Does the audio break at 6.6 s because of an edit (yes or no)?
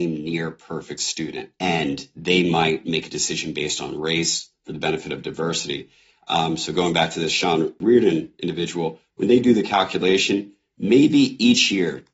no